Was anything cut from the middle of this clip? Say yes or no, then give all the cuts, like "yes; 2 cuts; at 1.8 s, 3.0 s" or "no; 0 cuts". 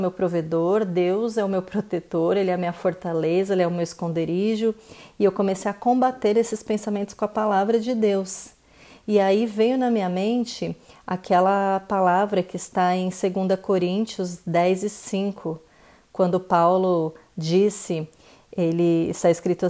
no; 0 cuts